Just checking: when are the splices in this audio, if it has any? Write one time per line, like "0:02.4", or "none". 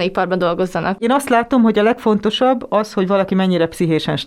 none